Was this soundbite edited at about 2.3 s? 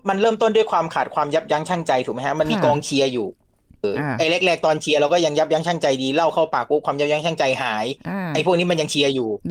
no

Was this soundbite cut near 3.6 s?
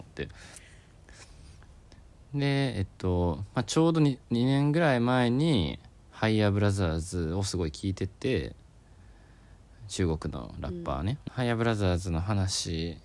no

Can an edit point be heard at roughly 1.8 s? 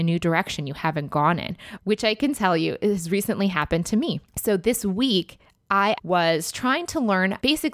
yes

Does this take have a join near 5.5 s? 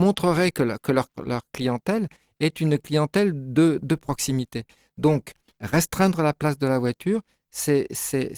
yes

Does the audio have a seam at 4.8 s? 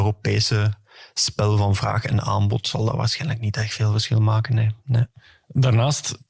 no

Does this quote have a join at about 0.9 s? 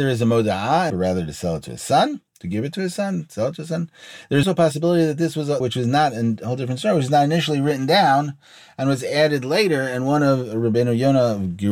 yes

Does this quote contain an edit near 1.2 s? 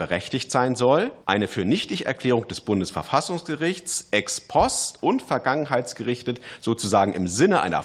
yes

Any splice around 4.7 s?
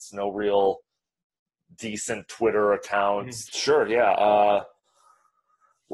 no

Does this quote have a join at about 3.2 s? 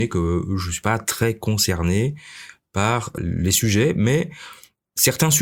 yes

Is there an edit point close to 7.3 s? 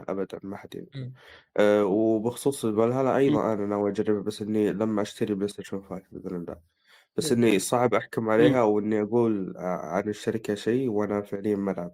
no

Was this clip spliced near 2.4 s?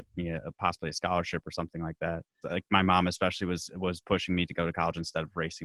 yes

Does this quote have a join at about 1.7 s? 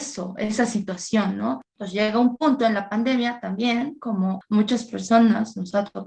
yes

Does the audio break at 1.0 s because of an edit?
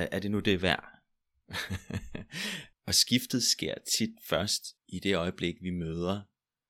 no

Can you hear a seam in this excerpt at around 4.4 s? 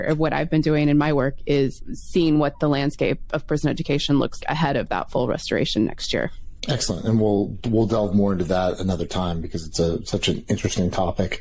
yes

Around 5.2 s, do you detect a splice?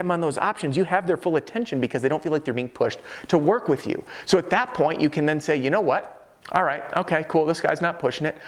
no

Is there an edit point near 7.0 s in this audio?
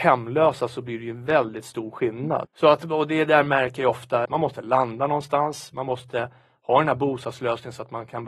no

